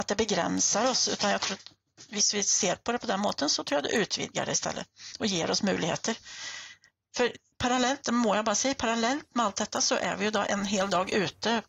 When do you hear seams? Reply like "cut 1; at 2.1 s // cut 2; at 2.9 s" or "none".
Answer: none